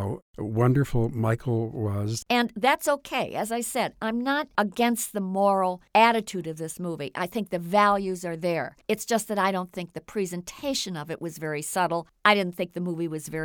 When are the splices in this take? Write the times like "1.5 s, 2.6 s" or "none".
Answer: none